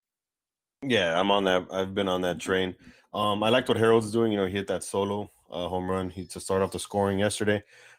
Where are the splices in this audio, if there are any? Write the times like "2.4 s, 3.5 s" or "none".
none